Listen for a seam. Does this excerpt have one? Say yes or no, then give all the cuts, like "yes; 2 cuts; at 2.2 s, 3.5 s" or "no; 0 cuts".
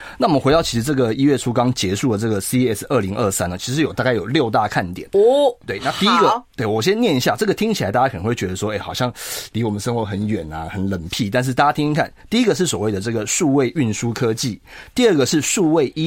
no; 0 cuts